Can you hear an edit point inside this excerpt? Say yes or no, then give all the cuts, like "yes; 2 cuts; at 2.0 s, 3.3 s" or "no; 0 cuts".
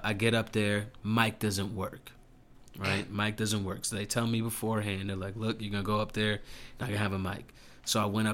no; 0 cuts